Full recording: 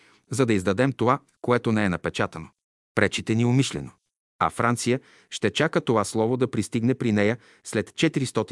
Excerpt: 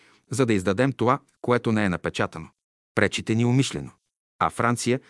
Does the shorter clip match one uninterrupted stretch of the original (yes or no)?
yes